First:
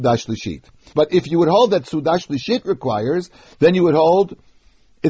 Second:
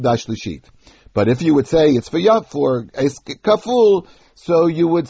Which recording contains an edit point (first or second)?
first